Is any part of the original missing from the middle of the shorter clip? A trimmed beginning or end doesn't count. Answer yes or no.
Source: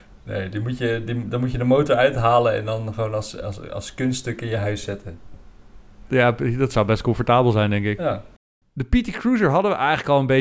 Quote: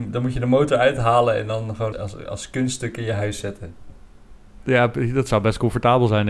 yes